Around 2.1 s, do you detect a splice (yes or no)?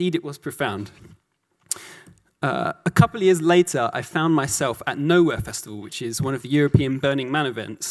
no